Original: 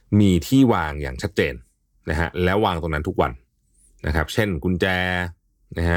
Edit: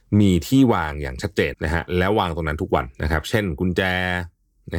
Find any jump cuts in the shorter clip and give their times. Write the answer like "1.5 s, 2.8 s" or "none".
1.5 s, 2.9 s